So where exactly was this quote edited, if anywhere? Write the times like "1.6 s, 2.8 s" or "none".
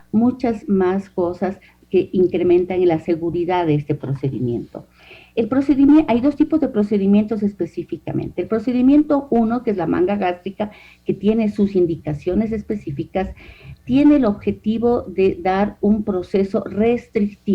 none